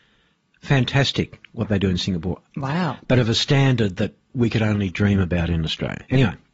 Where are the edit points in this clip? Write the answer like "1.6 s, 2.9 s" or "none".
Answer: 2.5 s, 4.2 s